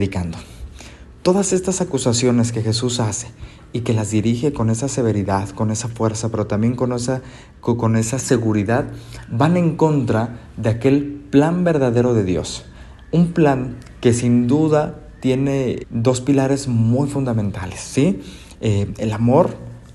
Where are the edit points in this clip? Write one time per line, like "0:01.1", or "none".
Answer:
0:15.8